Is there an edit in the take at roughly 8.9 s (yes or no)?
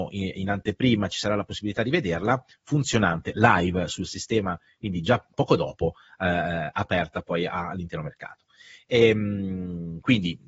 no